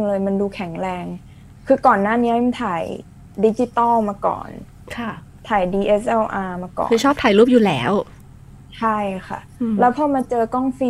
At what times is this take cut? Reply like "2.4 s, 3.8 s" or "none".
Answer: none